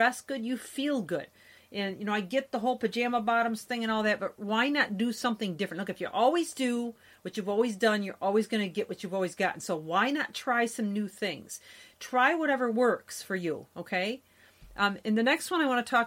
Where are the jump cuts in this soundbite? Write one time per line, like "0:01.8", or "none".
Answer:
none

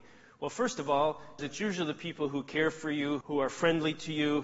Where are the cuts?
0:01.4
0:03.2

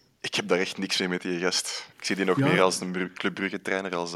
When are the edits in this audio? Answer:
0:01.9

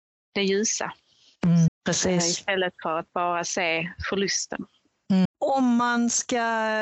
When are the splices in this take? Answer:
0:01.7
0:05.2

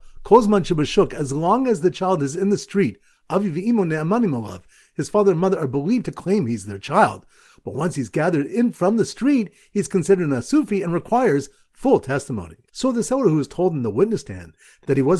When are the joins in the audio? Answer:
0:12.7

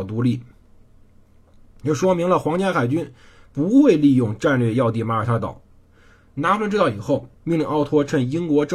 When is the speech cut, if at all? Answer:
0:06.3
0:07.3

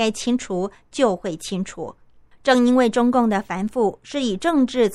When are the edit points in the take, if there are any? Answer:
0:02.3

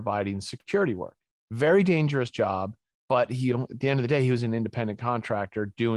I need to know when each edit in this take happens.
none

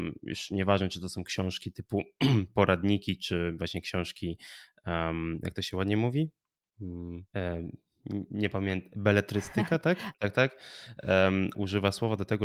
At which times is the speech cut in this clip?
0:07.3
0:10.1
0:11.5

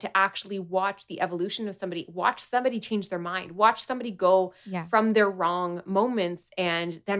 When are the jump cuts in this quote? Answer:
none

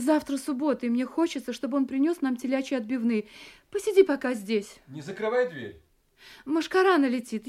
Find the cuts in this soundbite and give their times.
none

